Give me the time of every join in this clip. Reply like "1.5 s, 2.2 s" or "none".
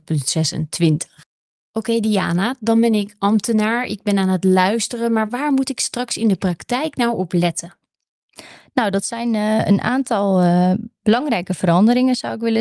none